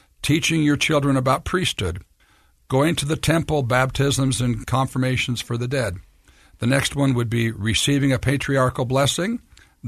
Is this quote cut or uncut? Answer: uncut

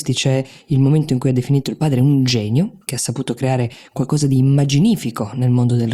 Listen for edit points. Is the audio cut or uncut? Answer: uncut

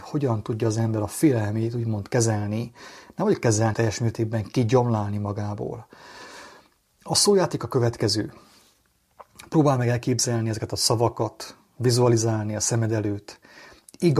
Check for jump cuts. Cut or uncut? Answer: cut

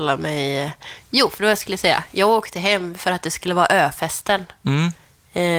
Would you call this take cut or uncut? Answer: uncut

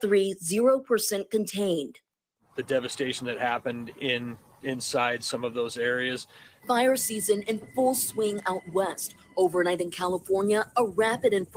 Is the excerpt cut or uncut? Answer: cut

